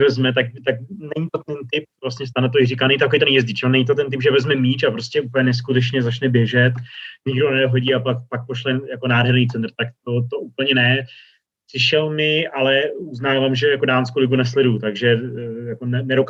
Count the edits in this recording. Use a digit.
0